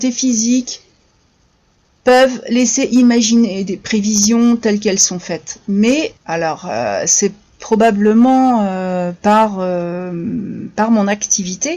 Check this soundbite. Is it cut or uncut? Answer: cut